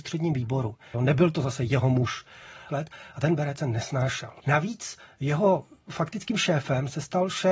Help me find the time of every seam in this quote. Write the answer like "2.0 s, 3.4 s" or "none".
0.9 s, 2.7 s, 4.4 s